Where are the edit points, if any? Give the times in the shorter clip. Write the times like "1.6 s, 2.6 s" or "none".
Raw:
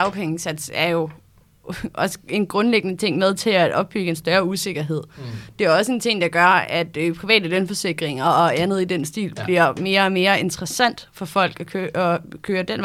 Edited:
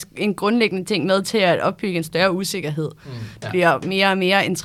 3.4 s